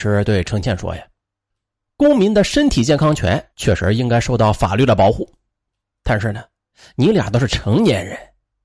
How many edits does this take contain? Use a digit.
1